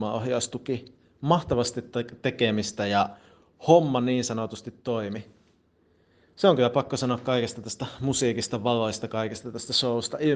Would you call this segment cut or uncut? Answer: uncut